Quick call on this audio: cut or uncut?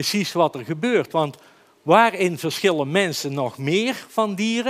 uncut